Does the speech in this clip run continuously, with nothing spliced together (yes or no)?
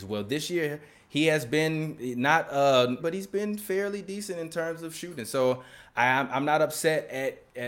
no